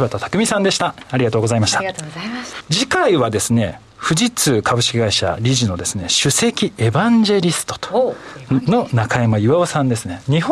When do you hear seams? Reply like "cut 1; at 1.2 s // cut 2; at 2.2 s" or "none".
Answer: cut 1; at 2.6 s